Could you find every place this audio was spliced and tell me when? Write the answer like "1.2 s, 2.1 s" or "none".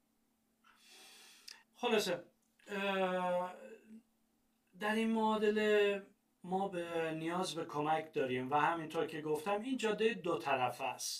1.6 s